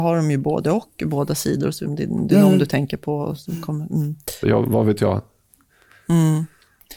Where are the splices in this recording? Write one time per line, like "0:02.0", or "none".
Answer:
0:01.9
0:04.4